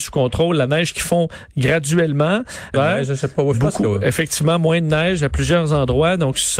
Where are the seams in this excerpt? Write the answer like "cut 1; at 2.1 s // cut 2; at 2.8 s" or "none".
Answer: cut 1; at 2.7 s